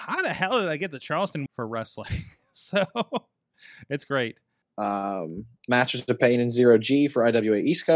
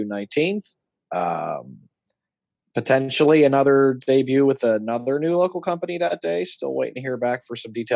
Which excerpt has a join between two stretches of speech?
first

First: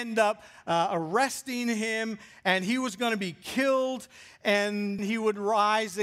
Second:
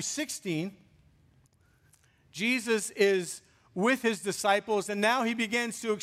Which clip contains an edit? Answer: first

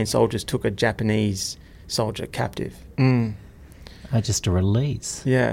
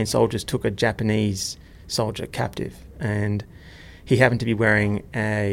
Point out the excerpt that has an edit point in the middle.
first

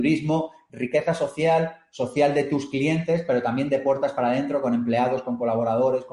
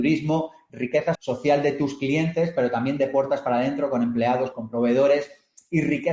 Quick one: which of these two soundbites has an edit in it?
second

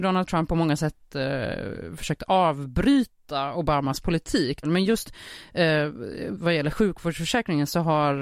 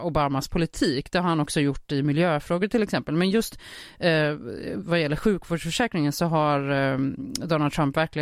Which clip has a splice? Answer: first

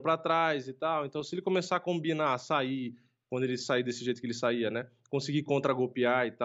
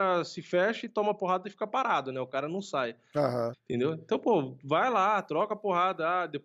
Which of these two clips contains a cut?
second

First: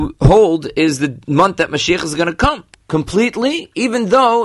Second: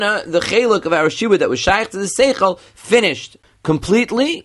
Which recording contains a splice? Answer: first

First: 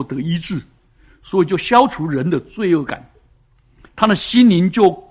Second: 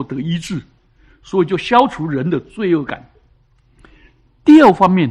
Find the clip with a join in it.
first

